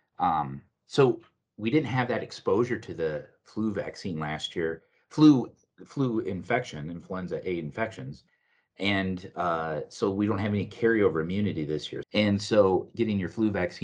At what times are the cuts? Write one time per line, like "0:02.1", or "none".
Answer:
0:12.0